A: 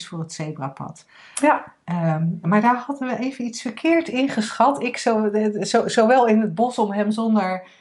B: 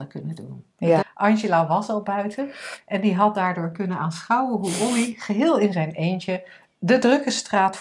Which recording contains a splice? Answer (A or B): B